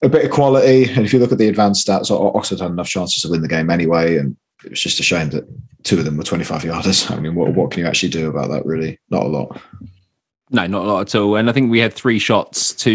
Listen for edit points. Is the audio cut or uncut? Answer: uncut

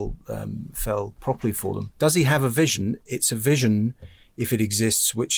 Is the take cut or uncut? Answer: uncut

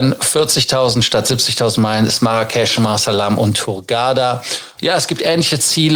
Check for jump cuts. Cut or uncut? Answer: cut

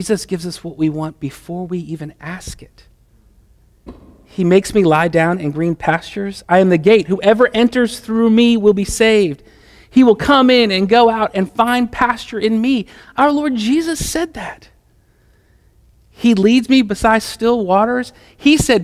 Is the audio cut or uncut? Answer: uncut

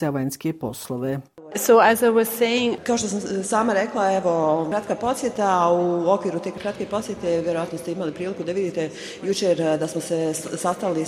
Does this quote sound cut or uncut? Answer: uncut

